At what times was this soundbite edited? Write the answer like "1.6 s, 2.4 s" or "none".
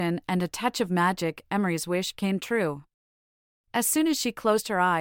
none